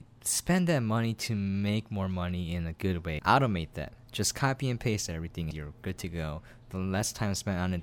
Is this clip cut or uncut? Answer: cut